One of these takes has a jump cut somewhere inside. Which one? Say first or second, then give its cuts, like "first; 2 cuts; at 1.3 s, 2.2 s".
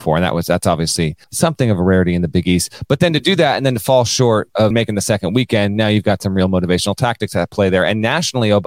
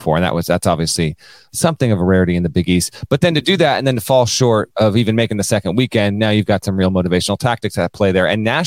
first; 2 cuts; at 1.2 s, 4.7 s